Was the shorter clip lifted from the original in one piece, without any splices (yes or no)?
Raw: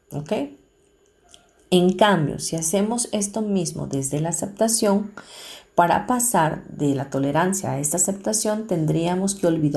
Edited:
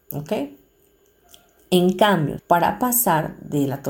no